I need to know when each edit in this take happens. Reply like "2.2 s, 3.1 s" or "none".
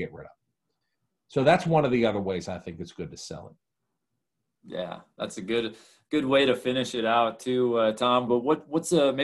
8.3 s